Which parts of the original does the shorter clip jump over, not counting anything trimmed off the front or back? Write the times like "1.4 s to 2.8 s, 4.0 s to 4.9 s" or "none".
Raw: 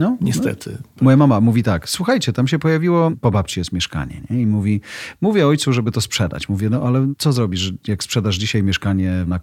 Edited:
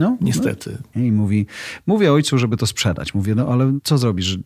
0.9 s to 4.3 s